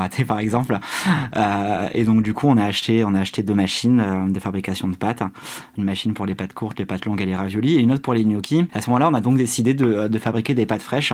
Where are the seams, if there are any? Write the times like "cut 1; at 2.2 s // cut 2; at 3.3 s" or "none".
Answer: cut 1; at 8.7 s